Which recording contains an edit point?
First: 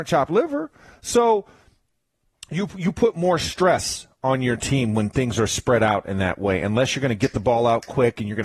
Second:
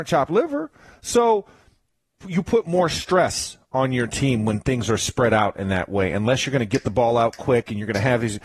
second; 1 cut; at 2.2 s

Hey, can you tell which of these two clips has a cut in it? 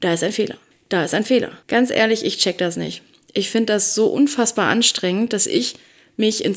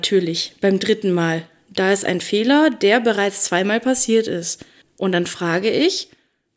first; 1 cut; at 1.6 s

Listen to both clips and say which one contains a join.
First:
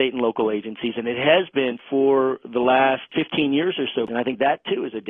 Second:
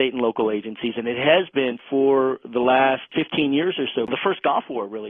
first; 1 cut; at 4.1 s

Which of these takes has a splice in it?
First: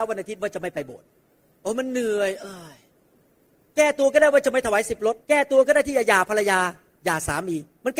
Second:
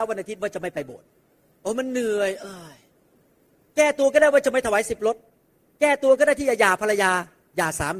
first; 1 cut; at 5.2 s

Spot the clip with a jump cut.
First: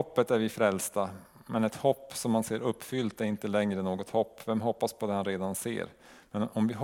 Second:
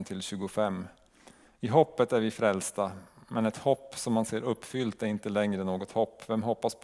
second; 1 cut; at 1.5 s

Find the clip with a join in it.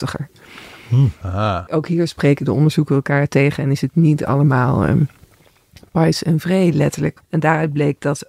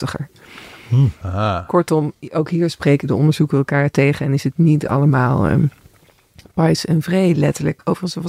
first; 2 cuts; at 1.7 s, 7.2 s

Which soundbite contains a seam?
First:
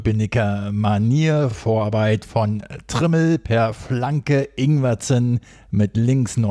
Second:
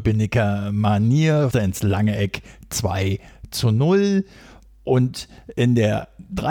second; 1 cut; at 1.5 s

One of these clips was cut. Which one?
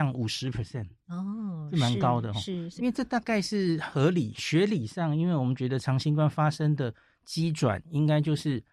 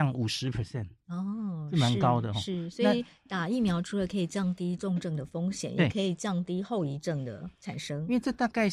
first; 1 cut; at 2.8 s

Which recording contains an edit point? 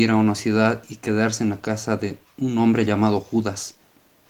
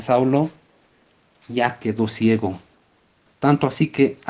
second; 1 cut; at 3.3 s

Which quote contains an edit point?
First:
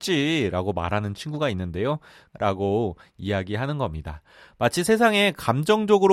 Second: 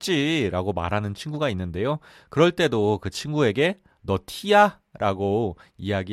first; 1 cut; at 2.3 s

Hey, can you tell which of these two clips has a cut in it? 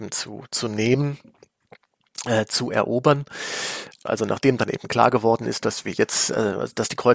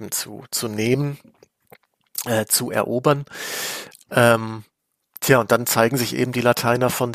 first; 1 cut; at 4.1 s

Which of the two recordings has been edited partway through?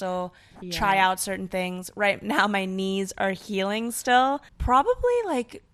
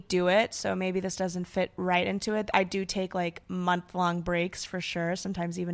first; 1 cut; at 4.5 s

